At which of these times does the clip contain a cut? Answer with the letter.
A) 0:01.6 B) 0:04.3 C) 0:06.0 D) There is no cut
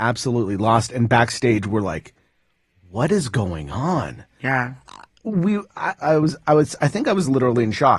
C